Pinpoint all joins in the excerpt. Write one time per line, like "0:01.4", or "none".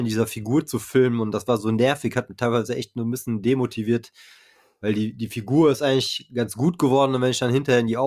none